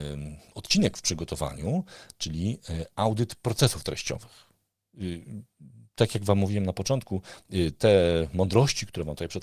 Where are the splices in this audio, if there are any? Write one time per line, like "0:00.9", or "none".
0:04.8